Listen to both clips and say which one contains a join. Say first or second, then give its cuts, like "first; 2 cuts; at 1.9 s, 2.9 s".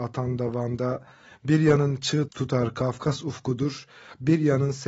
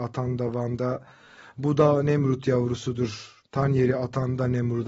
first; 2 cuts; at 1.2 s, 2.3 s